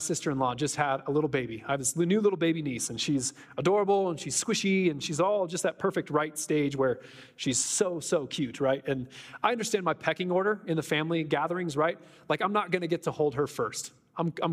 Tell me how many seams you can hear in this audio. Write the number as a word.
zero